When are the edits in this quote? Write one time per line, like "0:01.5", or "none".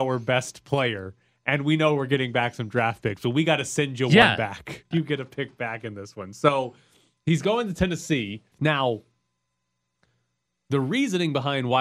0:04.9
0:08.5